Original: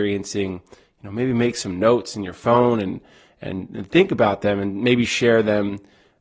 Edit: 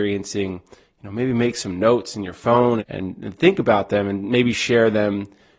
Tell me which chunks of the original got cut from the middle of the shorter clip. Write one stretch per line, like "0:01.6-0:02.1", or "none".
0:02.8-0:03.3